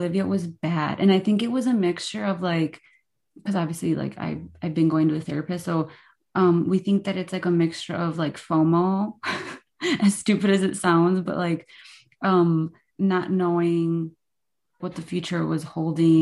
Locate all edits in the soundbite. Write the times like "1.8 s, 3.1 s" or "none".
12.9 s, 14.8 s